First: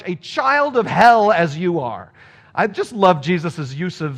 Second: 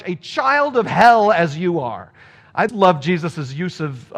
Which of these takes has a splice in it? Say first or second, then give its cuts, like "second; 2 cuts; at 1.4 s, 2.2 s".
second; 1 cut; at 2.7 s